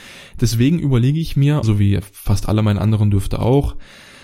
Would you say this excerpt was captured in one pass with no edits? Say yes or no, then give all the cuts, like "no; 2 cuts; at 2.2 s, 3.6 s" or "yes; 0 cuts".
no; 1 cut; at 1.6 s